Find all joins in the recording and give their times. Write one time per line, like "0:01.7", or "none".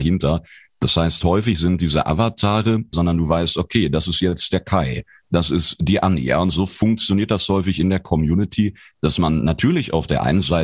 0:02.9